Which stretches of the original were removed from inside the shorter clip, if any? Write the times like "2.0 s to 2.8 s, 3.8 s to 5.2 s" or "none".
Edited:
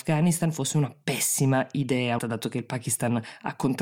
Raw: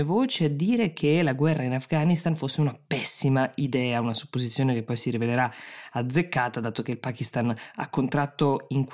4.0 s to 6.5 s

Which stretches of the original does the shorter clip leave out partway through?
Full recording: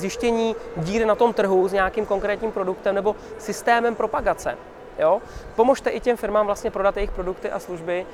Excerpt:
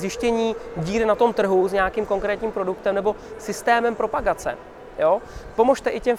none

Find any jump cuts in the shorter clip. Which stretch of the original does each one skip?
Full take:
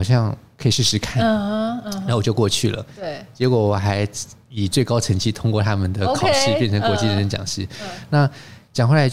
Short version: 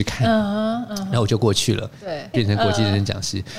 3.3 s to 6.6 s

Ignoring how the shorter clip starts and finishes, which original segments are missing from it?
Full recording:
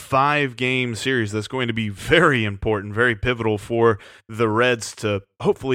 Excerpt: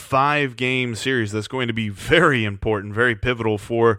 none

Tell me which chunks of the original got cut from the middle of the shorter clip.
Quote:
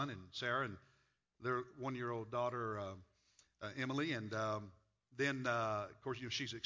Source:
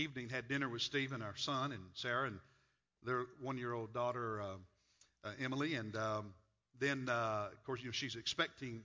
none

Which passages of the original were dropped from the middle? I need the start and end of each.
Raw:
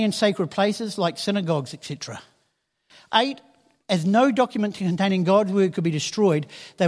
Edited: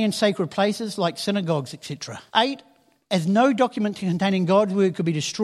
2.3 s to 3.1 s

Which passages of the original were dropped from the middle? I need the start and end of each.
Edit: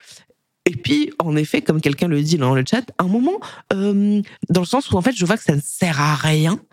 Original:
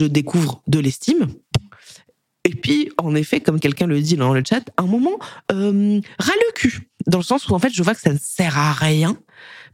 6.2 s to 6.9 s

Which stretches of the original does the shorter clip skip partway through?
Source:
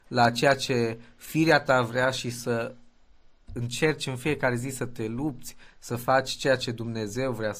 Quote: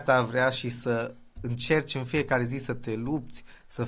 2.9 s to 3.4 s

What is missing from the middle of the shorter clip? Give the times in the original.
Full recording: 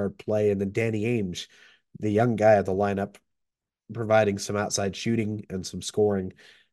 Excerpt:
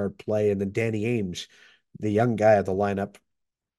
none

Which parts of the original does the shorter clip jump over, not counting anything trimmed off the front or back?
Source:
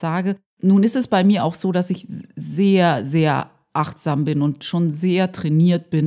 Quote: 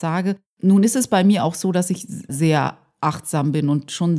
2.3 s to 3.0 s

